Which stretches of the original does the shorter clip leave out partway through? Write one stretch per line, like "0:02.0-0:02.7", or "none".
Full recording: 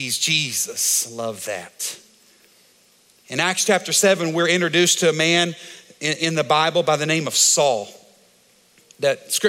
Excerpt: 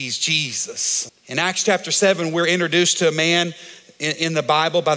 0:01.1-0:03.1